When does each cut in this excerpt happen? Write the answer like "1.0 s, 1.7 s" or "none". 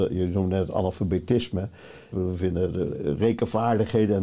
2.1 s